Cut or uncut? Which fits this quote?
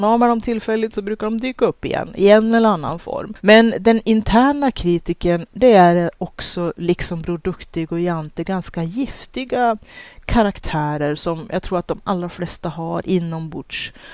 cut